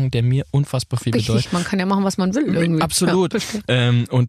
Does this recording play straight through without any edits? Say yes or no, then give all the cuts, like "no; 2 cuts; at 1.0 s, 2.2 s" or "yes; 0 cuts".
no; 2 cuts; at 1.5 s, 3.3 s